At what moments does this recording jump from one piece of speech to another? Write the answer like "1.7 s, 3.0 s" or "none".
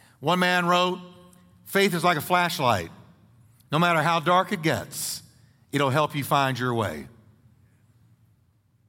none

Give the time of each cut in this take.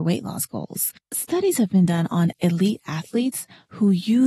1.0 s

